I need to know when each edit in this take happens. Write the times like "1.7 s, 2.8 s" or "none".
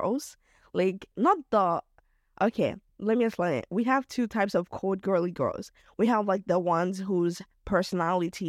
1.1 s